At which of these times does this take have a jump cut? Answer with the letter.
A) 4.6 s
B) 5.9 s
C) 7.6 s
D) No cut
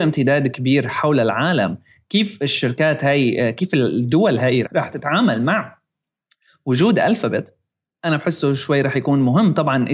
A